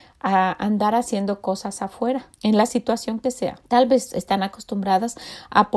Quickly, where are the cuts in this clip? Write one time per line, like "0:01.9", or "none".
0:02.3
0:03.6